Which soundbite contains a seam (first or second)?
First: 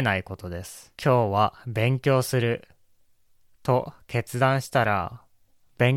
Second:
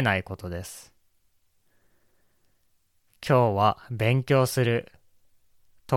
first